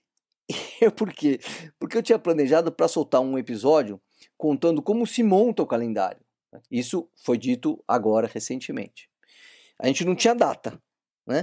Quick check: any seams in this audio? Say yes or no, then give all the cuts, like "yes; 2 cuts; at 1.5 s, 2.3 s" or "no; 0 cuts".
yes; 1 cut; at 6.7 s